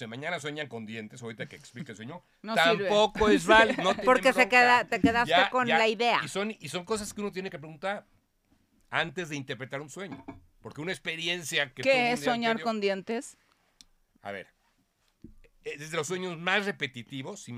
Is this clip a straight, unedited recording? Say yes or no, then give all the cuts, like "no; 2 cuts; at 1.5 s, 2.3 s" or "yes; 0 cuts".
yes; 0 cuts